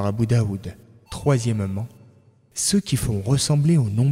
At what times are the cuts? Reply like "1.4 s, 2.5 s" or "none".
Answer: 1.1 s